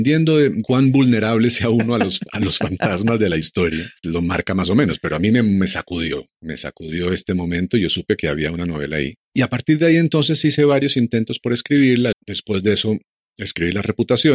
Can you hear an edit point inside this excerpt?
yes; 2 cuts; at 4.0 s, 12.1 s

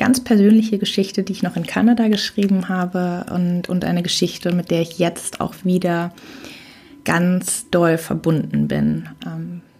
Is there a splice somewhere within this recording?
no; 0 cuts

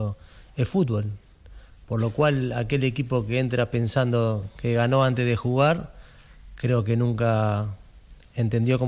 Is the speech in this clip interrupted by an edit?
no; 0 cuts

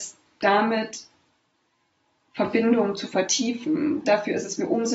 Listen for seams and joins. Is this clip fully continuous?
no; 1 cut; at 4.0 s

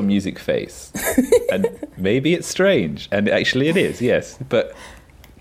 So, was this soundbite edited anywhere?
no; 0 cuts

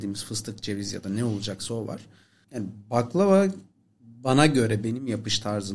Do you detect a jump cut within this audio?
yes; 1 cut; at 2.4 s

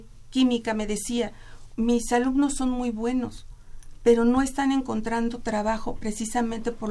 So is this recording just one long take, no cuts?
no; 1 cut; at 1.7 s

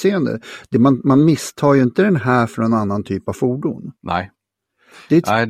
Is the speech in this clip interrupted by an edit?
yes; 1 cut; at 4.0 s

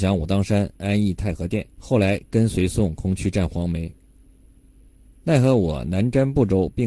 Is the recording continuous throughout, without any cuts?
no; 2 cuts; at 1.7 s, 5.1 s

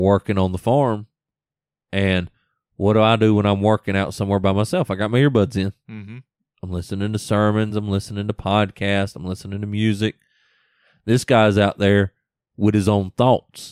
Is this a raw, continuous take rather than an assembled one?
yes; 0 cuts

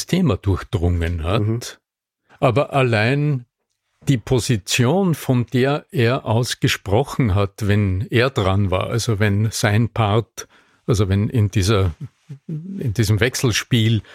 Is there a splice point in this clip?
no; 0 cuts

